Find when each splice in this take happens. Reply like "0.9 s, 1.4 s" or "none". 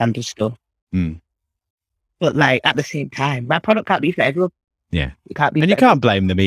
none